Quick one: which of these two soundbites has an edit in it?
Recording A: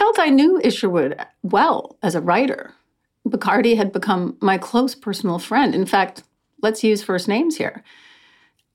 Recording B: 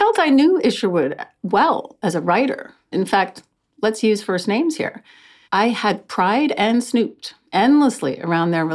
B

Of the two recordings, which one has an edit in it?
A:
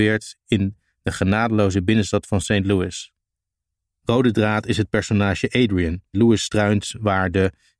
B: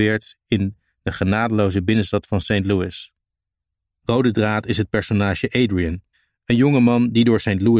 A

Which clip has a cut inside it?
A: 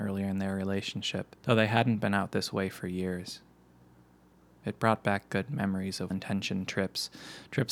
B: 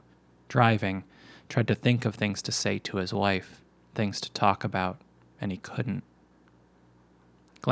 A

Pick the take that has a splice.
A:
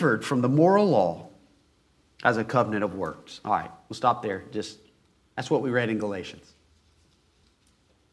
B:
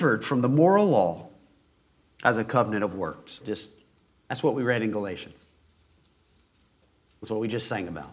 B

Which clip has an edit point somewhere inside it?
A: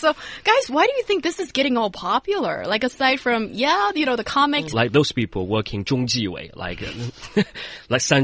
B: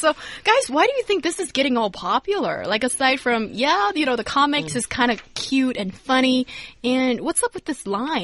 A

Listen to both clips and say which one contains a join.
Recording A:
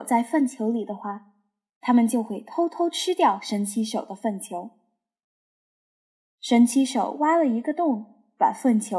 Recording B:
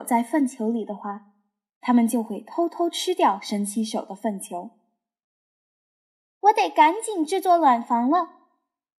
A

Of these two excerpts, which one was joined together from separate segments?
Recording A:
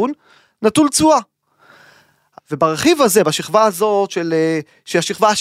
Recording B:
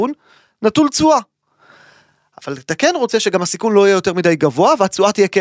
A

